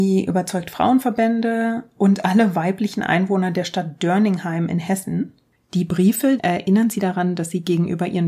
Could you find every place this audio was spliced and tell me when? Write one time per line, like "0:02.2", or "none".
0:06.4

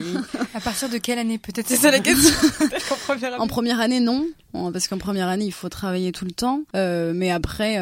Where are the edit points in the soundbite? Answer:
0:05.5

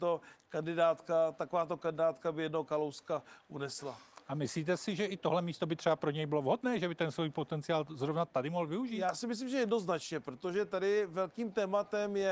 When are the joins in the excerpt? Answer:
none

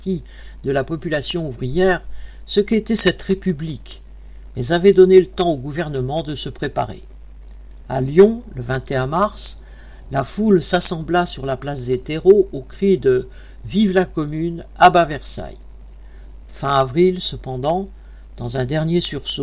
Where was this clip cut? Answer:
0:07.8
0:10.0
0:16.4

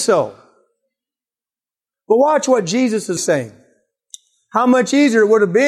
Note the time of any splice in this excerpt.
0:01.9
0:03.2

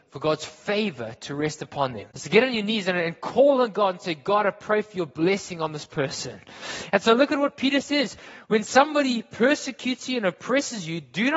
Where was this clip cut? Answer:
0:02.1

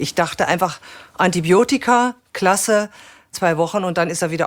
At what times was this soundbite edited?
0:03.3

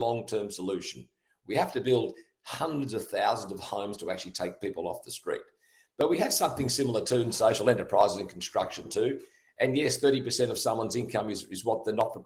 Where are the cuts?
none

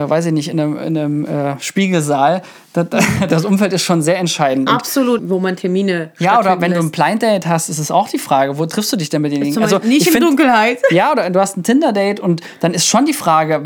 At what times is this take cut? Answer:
0:05.2

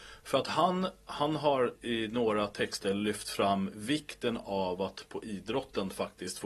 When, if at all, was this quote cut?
0:01.7

